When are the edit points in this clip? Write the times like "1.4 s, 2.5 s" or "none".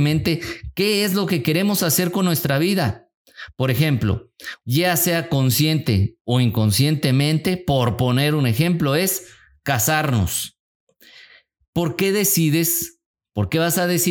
4.6 s